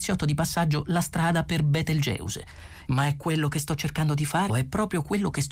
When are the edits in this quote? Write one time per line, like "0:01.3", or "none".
0:02.9
0:04.5

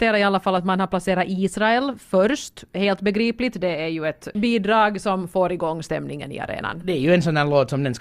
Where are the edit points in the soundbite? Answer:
0:04.3

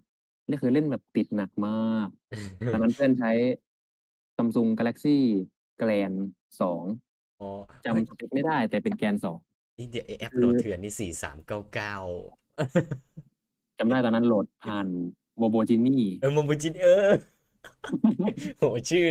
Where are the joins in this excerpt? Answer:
none

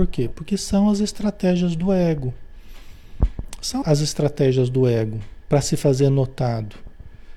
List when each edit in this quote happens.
0:03.8

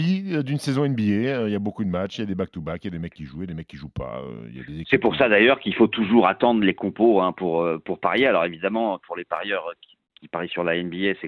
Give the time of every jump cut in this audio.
none

